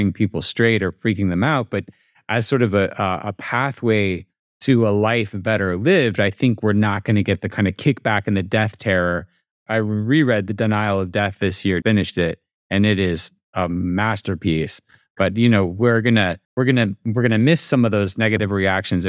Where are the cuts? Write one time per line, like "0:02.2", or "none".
0:11.8
0:16.4